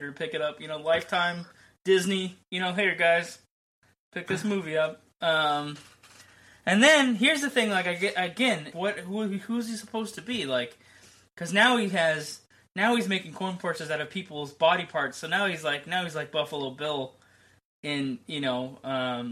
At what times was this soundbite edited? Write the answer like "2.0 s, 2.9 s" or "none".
8.7 s